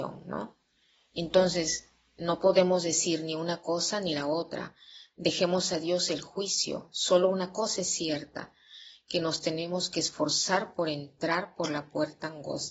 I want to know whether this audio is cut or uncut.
uncut